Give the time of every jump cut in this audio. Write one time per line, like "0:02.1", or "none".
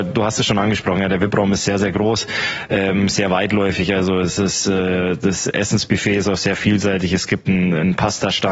none